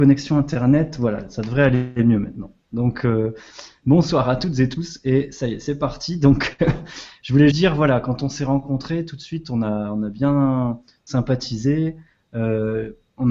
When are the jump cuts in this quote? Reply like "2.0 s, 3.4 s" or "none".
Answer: 7.5 s